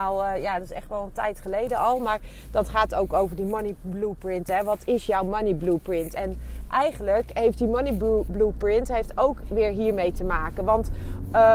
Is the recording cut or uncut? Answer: uncut